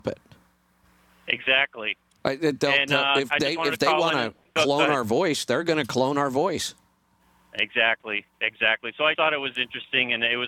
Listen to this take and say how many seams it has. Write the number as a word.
one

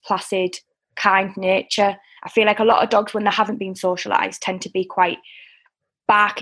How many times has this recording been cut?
zero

